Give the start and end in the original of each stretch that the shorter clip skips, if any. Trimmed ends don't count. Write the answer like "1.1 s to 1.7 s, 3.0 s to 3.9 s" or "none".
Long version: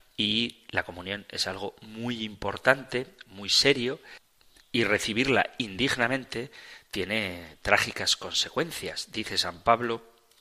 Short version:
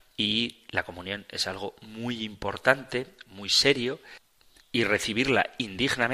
none